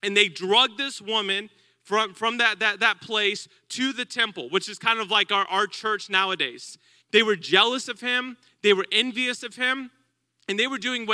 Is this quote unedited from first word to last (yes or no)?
no